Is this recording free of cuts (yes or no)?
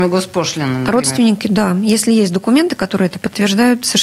yes